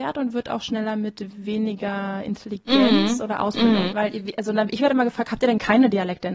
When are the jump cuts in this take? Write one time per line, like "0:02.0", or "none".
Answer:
0:03.9